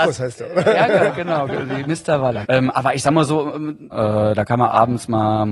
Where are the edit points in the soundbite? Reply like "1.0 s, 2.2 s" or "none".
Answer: 2.4 s, 3.9 s